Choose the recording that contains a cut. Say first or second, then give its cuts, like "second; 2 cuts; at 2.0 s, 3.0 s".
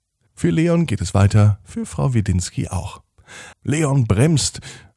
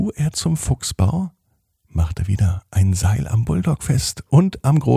first; 1 cut; at 3.5 s